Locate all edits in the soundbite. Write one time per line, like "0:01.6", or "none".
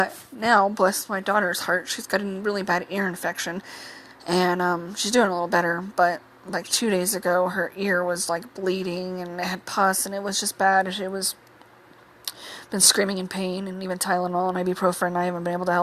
none